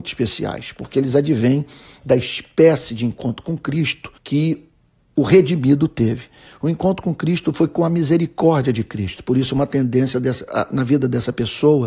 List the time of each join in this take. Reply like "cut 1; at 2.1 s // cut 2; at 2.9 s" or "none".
cut 1; at 4.2 s